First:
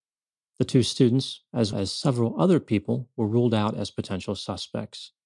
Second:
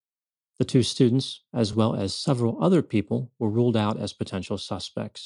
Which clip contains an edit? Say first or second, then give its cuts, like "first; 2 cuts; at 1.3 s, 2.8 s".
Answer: first; 1 cut; at 1.7 s